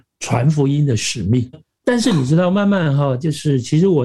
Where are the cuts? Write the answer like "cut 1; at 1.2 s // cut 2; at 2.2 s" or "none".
cut 1; at 1.5 s